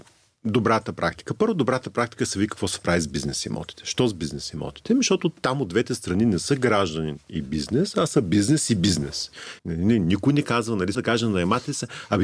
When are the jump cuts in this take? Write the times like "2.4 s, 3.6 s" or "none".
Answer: 9.6 s, 10.9 s